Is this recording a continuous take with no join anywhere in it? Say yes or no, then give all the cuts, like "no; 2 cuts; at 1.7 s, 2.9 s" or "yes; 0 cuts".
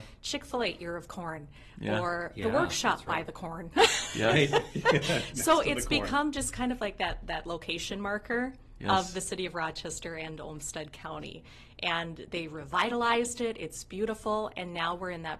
yes; 0 cuts